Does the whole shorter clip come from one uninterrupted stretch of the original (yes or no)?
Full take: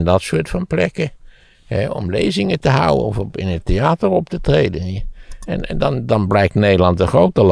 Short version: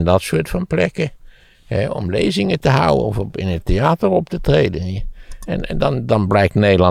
yes